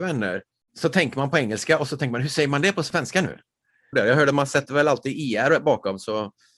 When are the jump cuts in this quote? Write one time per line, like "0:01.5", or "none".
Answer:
0:03.9